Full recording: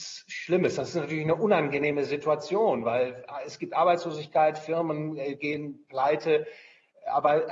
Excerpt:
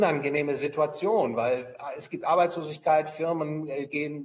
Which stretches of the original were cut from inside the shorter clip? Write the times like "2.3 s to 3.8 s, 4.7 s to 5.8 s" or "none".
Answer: none